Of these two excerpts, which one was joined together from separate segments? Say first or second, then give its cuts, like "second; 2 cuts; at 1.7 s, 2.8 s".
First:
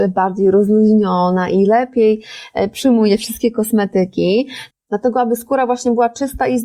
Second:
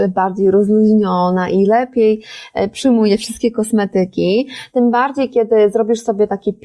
first; 1 cut; at 4.7 s